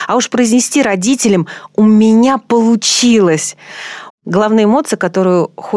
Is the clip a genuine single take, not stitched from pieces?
no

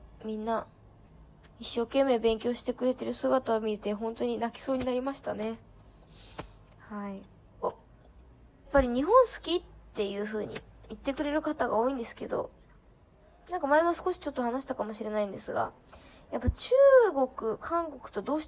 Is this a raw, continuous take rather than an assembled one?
yes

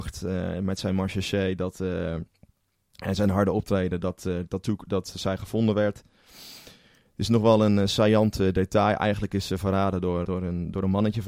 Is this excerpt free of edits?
no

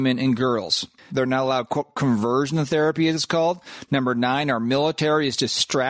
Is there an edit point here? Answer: yes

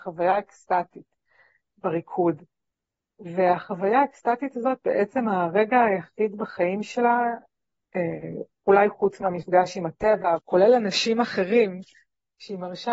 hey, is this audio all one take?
no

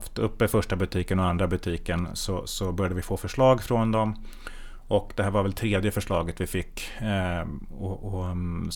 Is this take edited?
no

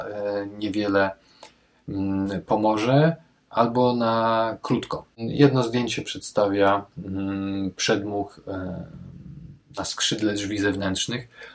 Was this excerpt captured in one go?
yes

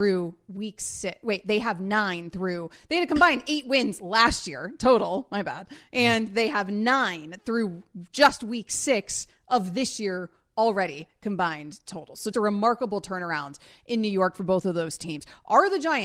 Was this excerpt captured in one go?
no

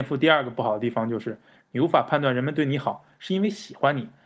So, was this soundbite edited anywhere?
yes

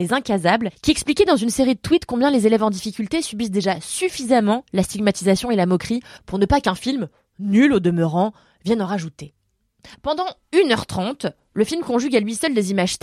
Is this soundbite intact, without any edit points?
no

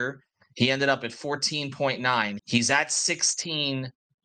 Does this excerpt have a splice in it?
yes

